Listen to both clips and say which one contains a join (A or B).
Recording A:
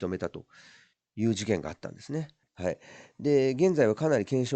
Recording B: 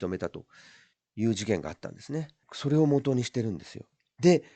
A